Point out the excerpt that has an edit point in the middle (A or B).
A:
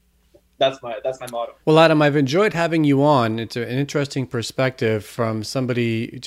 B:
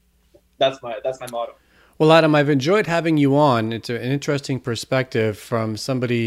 A